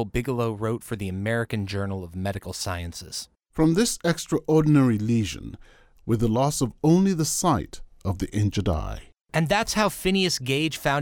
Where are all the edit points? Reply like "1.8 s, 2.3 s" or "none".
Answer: 6.0 s